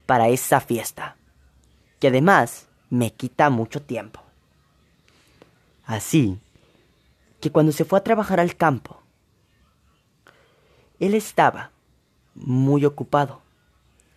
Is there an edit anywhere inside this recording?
no; 0 cuts

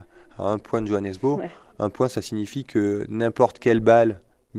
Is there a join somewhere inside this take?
no; 0 cuts

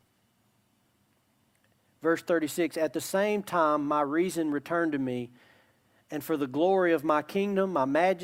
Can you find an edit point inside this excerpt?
no; 0 cuts

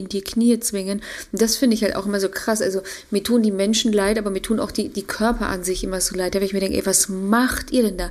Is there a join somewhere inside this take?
no; 0 cuts

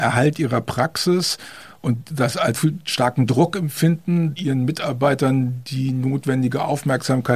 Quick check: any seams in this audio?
yes; 2 cuts; at 2.5 s, 4.4 s

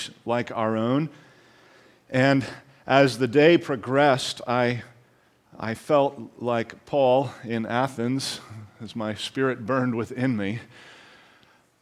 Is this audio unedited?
yes; 0 cuts

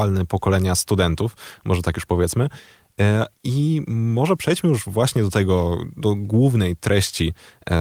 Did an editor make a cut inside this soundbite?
yes; 1 cut; at 3.3 s

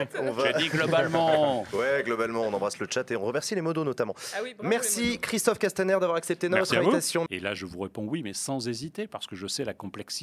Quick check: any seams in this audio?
yes; 1 cut; at 7.3 s

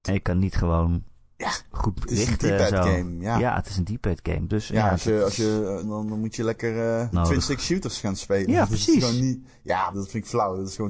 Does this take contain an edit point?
yes; 3 cuts; at 5.8 s, 7.1 s, 9.9 s

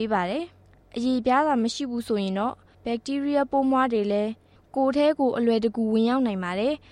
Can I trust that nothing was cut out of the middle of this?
yes; 0 cuts

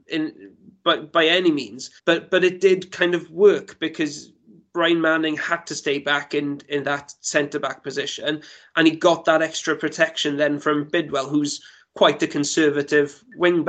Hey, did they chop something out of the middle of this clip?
yes; 1 cut; at 2.0 s

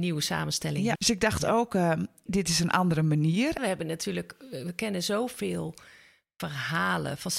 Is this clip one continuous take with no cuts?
no; 3 cuts; at 0.9 s, 2.3 s, 3.6 s

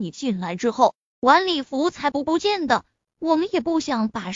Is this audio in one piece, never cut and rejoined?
yes; 0 cuts

